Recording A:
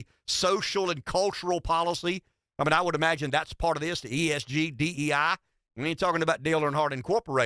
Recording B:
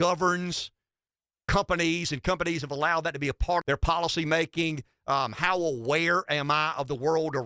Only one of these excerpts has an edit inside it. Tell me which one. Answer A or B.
B